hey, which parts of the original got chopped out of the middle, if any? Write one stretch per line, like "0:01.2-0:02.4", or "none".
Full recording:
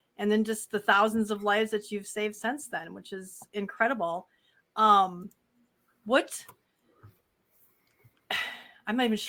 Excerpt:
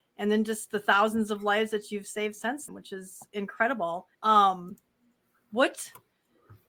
0:02.7-0:02.9
0:04.4-0:04.7